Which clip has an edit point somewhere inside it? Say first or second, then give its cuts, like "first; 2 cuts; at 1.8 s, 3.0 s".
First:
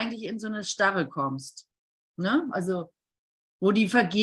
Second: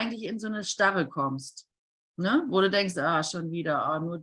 first; 1 cut; at 2.5 s